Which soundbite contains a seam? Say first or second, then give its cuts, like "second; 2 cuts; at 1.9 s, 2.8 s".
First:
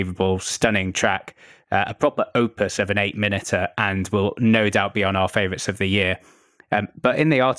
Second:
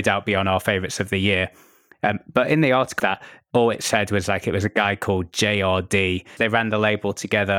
second; 2 cuts; at 3.0 s, 6.4 s